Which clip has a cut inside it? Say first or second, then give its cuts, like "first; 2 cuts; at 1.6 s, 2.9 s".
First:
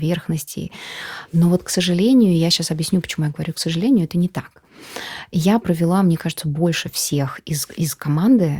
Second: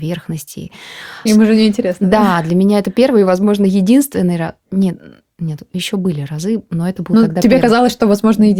second; 1 cut; at 1.3 s